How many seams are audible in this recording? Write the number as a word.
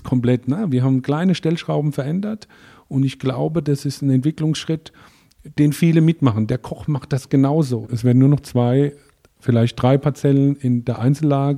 one